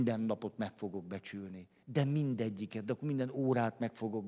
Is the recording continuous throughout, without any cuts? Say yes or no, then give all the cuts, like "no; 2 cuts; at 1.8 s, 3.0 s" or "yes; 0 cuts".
yes; 0 cuts